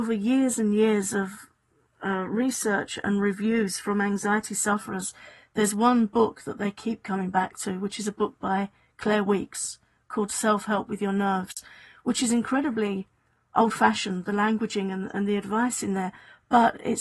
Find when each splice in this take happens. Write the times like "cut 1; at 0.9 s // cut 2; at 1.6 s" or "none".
none